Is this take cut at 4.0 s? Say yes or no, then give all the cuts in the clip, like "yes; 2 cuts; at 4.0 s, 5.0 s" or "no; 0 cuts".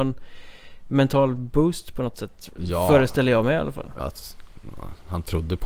yes; 1 cut; at 4.0 s